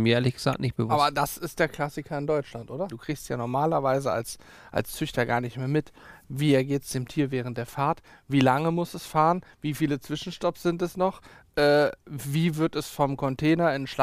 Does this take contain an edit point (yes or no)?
yes